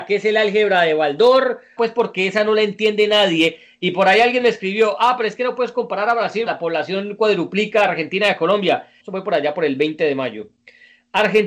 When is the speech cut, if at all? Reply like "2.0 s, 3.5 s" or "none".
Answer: 1.8 s, 6.5 s, 9.0 s